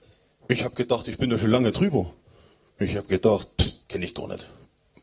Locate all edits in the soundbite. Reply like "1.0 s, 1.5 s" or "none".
3.8 s